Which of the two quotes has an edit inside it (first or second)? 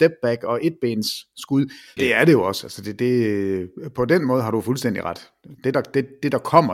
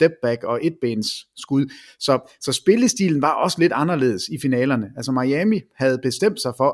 first